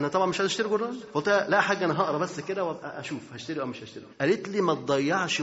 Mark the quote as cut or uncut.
cut